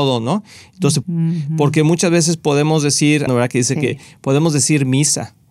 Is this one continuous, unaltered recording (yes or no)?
no